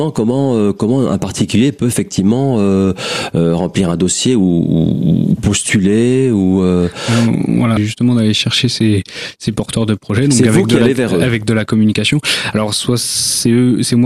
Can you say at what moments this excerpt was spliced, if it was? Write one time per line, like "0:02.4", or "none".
0:07.8